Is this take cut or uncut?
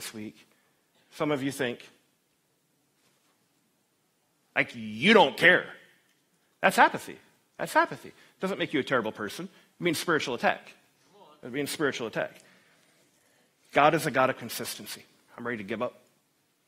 cut